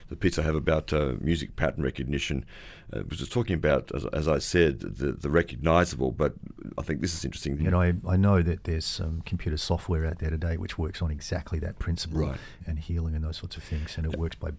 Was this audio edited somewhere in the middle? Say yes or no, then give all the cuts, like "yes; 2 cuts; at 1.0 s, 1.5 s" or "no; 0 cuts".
yes; 2 cuts; at 7.6 s, 12.6 s